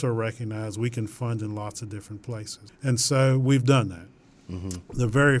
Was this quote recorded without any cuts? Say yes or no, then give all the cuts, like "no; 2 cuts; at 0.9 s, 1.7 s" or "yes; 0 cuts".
no; 1 cut; at 2.7 s